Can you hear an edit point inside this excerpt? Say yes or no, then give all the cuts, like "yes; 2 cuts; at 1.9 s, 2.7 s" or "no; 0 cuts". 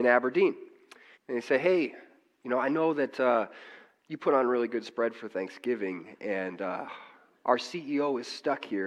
yes; 1 cut; at 1.1 s